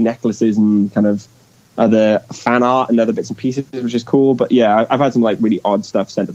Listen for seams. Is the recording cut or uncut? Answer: uncut